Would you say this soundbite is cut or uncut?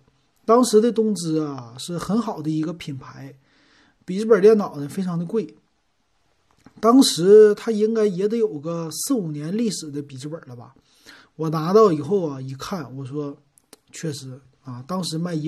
uncut